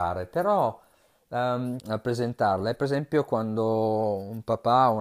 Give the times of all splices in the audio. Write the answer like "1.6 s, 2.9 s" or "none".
1.8 s